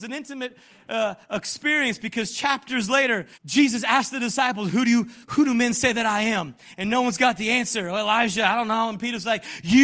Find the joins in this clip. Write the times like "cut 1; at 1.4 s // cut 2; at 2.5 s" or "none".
cut 1; at 3.3 s // cut 2; at 5.2 s